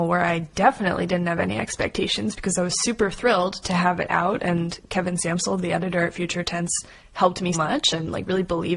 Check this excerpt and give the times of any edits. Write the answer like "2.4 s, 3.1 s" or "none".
7.5 s